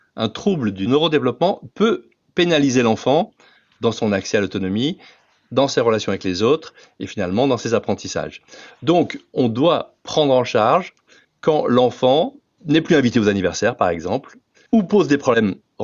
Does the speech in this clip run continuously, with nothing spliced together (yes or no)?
yes